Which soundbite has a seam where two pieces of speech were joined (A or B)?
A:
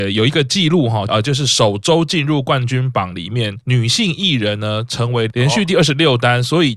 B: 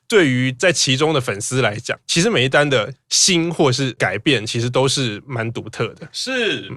A